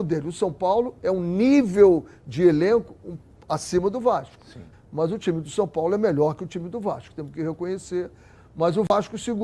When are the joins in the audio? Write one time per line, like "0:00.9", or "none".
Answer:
0:04.7
0:08.3